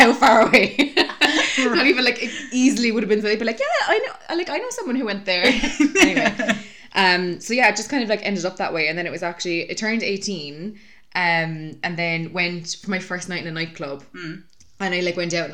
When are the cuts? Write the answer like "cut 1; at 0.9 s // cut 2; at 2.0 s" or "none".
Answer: none